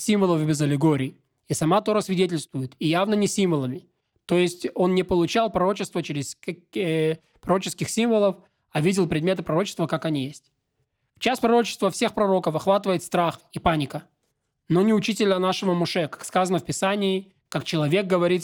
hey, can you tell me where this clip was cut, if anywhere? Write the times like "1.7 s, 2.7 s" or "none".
none